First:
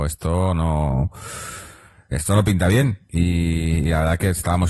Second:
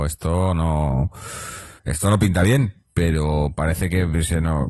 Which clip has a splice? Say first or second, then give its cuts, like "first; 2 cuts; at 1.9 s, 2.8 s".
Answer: second; 2 cuts; at 1.8 s, 2.8 s